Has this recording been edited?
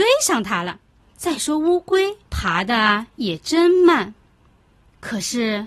yes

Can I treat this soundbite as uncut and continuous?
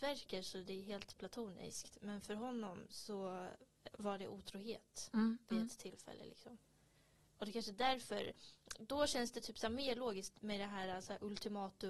no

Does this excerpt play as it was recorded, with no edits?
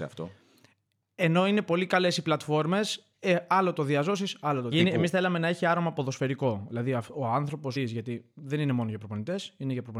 no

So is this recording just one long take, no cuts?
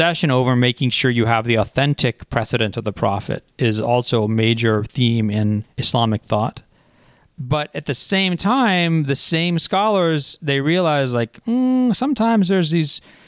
yes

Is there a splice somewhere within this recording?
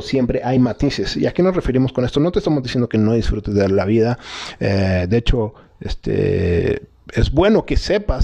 no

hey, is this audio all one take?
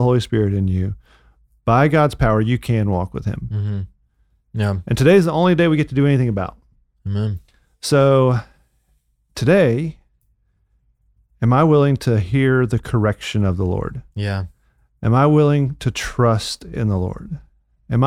yes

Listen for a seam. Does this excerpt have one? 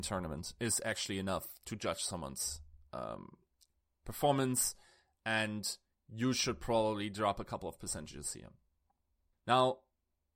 yes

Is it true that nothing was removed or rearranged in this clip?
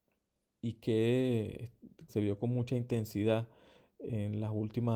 no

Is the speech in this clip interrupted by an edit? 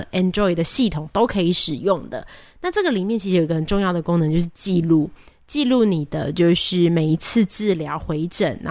no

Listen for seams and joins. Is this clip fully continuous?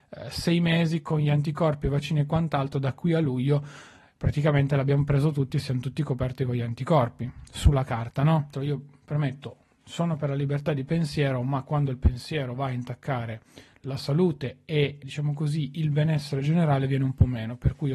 no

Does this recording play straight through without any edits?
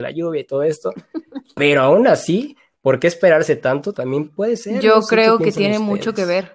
yes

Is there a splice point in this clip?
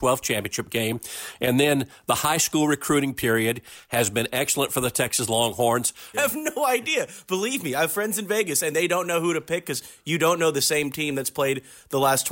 yes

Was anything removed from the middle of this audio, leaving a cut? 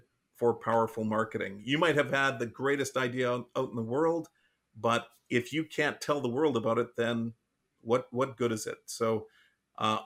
no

